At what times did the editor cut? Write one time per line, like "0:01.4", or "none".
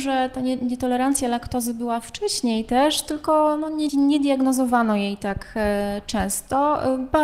0:03.9